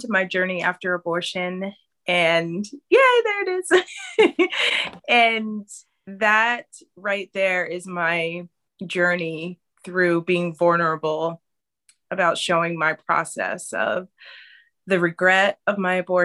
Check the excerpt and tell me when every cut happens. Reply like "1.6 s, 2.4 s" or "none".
none